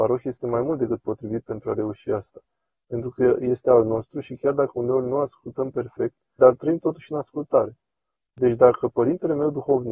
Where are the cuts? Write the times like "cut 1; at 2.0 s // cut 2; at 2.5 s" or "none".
cut 1; at 6.4 s